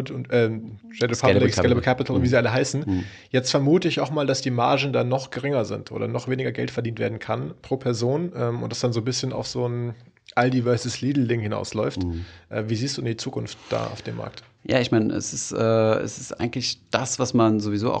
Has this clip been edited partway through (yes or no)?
no